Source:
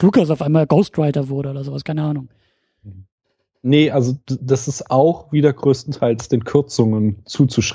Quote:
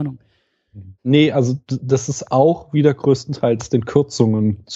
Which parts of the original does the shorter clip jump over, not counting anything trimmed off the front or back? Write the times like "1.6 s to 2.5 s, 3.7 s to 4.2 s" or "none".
3.1 s to 3.6 s